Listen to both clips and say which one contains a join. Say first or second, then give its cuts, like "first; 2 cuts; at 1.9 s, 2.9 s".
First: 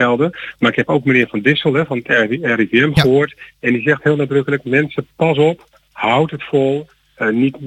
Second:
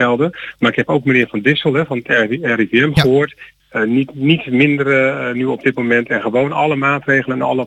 second; 1 cut; at 3.6 s